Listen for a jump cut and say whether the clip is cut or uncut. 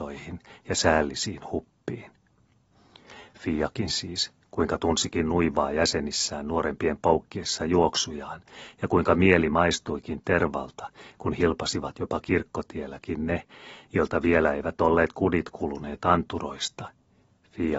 uncut